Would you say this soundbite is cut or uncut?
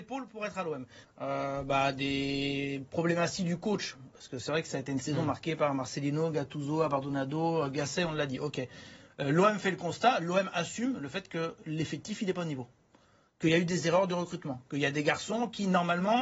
cut